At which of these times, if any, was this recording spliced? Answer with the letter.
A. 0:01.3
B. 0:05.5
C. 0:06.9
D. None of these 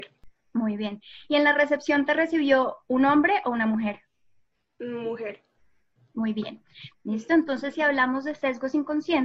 C